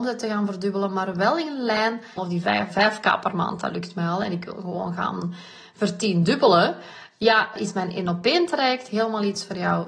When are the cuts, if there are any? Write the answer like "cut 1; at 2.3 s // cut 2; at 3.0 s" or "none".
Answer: cut 1; at 2.2 s // cut 2; at 7.6 s